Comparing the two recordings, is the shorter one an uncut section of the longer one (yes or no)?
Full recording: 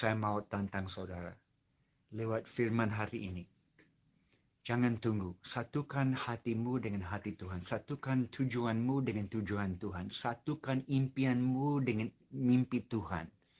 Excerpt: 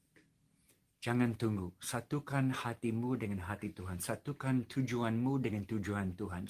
yes